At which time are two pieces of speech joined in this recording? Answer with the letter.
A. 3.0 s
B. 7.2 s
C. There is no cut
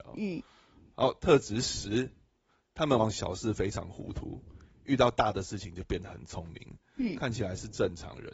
A